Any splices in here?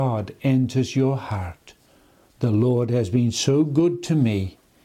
no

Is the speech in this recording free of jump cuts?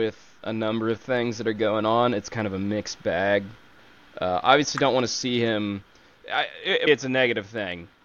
no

